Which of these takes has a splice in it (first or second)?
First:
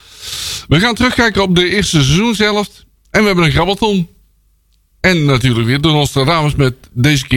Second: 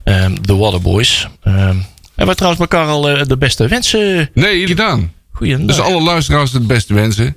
second